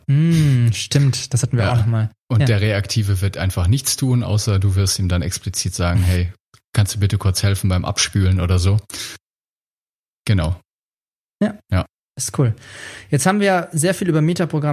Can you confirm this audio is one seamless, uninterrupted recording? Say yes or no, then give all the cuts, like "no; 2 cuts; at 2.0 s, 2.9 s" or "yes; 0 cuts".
yes; 0 cuts